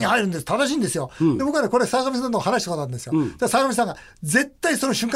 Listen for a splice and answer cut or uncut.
uncut